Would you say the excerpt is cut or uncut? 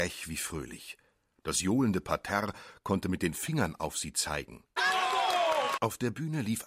cut